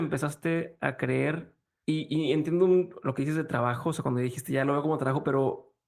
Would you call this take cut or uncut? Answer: uncut